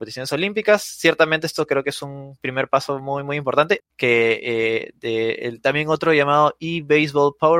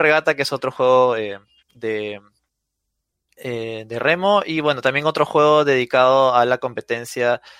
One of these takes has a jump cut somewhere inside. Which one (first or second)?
first